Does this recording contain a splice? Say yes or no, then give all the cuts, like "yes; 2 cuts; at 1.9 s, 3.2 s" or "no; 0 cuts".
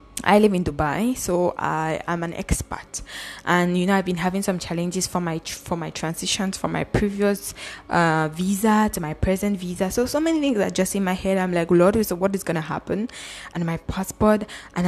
no; 0 cuts